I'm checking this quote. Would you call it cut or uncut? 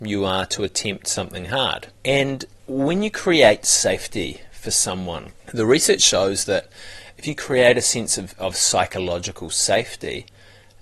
uncut